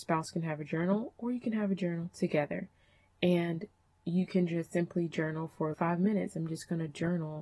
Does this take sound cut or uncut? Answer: cut